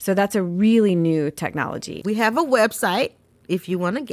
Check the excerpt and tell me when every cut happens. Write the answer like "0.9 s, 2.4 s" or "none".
2.0 s